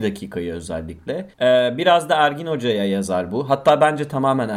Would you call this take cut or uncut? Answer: cut